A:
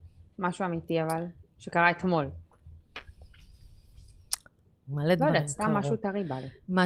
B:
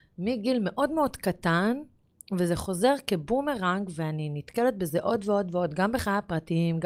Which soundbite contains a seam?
A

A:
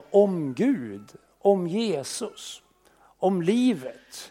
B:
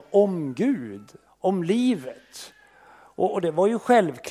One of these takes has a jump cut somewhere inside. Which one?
B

